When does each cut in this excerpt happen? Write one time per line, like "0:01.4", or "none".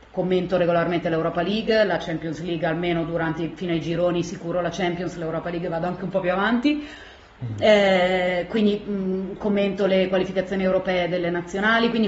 none